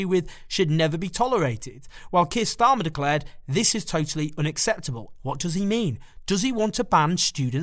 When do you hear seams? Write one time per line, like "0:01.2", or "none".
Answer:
0:05.1

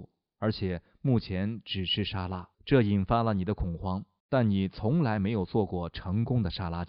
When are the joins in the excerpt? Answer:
0:02.5
0:04.2

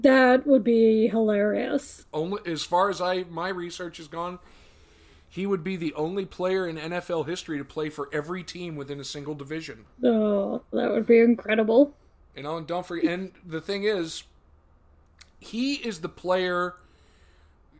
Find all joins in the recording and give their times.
0:09.9

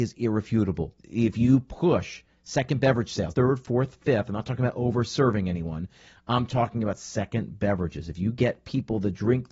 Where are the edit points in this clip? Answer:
0:01.0
0:03.3

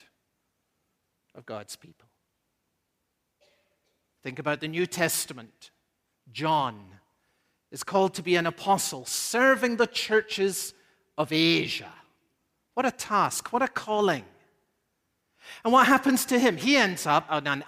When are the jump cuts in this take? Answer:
none

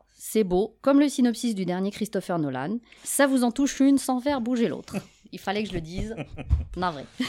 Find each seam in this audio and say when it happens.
0:03.0

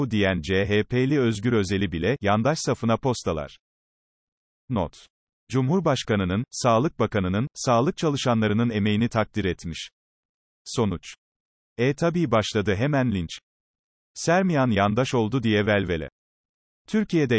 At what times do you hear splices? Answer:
0:05.4

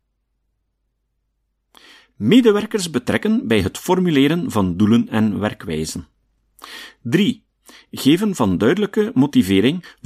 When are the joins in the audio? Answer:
none

